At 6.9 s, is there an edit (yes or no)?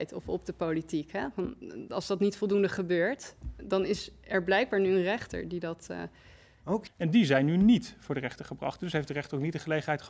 yes